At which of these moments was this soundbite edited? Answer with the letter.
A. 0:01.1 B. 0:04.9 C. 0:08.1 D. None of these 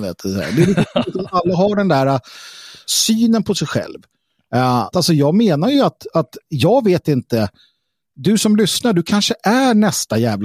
B